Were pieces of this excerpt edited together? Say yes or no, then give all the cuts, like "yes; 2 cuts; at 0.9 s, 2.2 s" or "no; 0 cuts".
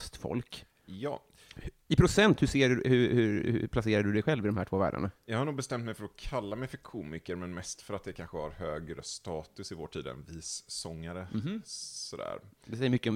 yes; 1 cut; at 5.2 s